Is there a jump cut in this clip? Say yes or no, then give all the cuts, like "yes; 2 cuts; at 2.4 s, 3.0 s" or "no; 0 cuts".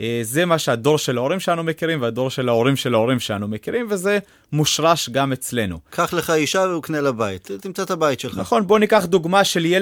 no; 0 cuts